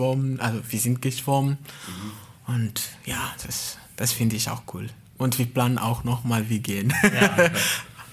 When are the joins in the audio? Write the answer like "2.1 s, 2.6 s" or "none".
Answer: none